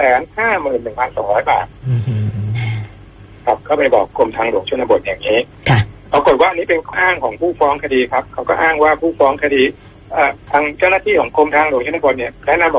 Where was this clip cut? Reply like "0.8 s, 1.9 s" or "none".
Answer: 6.9 s, 10.4 s